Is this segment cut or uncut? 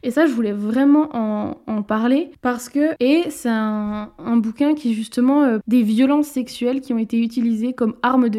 cut